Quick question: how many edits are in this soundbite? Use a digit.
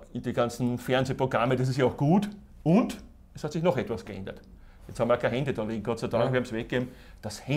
0